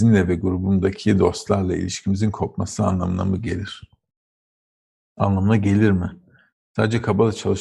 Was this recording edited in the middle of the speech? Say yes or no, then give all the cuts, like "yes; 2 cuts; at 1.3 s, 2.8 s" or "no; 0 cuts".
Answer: no; 0 cuts